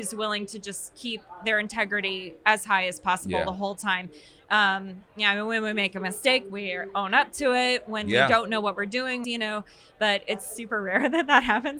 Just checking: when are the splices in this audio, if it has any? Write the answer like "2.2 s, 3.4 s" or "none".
9.2 s